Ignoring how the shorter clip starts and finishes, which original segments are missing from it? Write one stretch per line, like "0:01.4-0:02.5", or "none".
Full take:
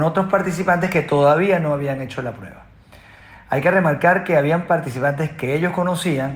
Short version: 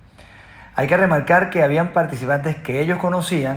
none